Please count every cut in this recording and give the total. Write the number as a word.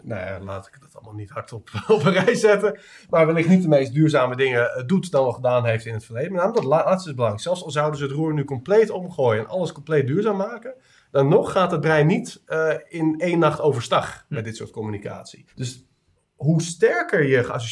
one